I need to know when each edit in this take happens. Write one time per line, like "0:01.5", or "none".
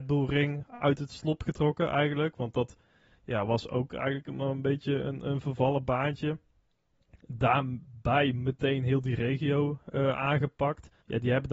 none